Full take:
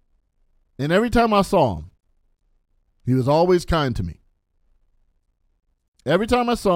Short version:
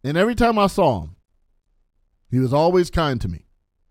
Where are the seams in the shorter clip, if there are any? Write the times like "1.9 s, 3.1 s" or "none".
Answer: none

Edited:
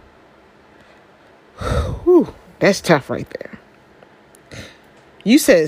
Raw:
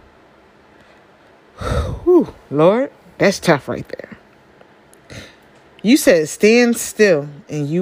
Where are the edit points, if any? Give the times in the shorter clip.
2.5 s

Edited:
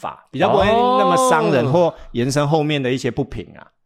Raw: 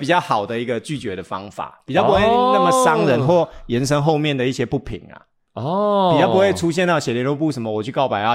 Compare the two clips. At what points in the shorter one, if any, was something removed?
none

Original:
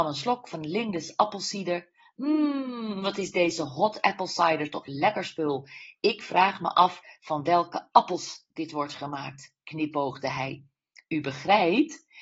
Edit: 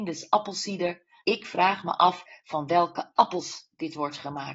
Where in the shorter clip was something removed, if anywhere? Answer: 1.2 s

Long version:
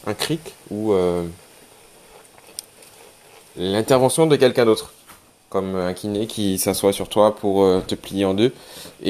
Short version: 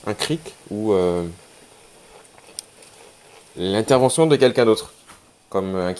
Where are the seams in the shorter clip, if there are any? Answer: none

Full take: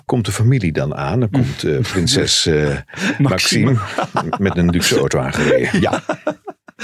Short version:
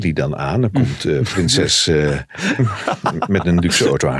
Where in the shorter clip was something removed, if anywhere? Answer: 2.6 s

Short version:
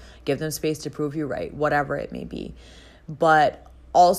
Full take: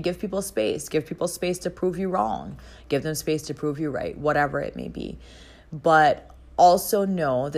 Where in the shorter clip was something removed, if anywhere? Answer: none

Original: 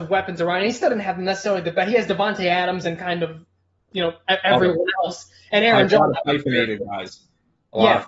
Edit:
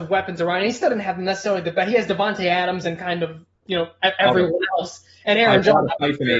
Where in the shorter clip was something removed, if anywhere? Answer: 3.5 s

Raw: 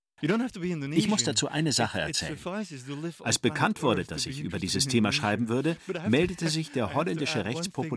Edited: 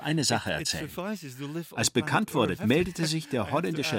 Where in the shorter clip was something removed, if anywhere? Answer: 2.6 s

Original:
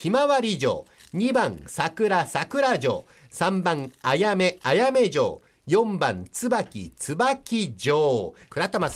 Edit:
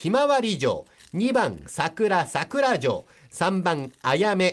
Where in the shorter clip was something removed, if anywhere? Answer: none

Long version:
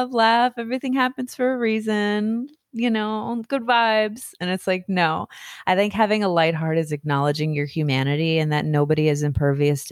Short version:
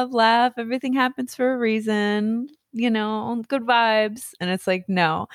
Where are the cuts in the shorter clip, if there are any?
none

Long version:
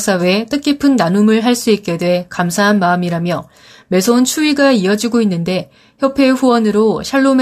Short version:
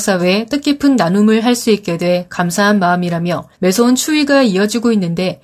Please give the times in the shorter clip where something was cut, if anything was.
3.5 s

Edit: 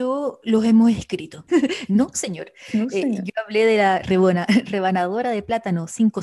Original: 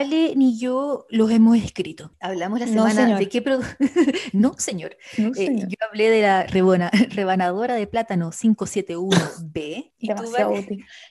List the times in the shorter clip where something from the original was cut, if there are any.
1.5 s

